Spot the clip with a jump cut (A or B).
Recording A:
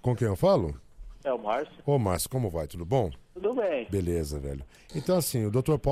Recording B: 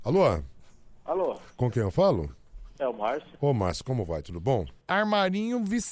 B